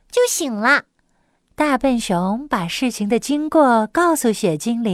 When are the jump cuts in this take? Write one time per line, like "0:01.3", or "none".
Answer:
0:01.5